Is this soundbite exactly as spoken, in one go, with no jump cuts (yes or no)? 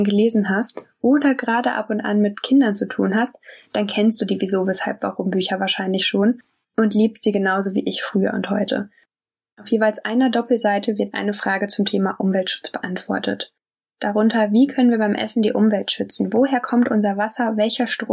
yes